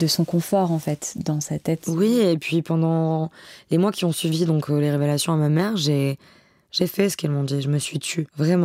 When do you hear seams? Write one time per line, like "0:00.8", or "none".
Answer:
none